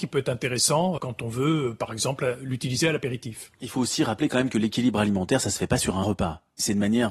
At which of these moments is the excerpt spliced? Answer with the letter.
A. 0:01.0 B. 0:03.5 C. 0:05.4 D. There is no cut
A